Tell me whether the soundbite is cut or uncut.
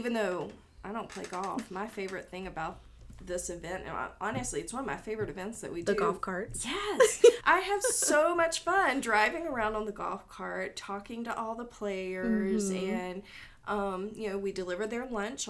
cut